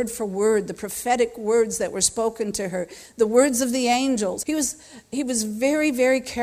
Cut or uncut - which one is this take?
cut